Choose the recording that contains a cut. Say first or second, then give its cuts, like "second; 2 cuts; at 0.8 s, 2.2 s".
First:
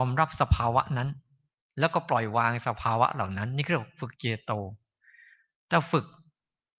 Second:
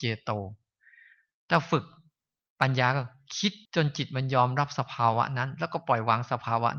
second; 1 cut; at 3.7 s